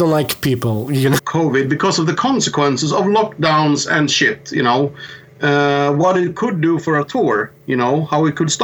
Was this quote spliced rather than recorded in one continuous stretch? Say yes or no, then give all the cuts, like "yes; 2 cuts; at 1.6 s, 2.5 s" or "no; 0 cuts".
yes; 1 cut; at 1.2 s